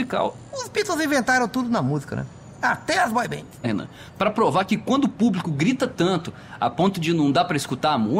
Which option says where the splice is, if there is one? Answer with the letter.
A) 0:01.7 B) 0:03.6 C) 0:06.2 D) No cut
B